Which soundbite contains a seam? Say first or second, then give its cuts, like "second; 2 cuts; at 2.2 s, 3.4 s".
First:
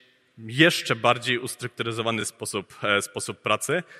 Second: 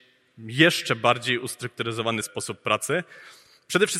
second; 1 cut; at 2.2 s